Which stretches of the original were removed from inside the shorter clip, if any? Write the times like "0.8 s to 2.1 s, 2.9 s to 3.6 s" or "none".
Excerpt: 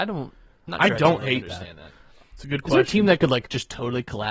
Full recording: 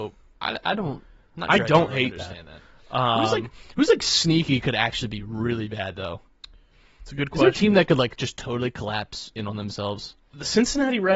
2.9 s to 6.9 s